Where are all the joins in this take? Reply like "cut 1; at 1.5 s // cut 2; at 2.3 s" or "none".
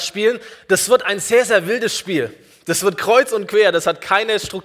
none